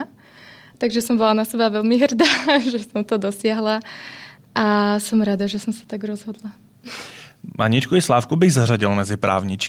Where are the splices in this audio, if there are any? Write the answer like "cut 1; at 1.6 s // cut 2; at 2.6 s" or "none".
none